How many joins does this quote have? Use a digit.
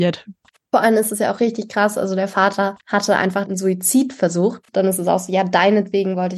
2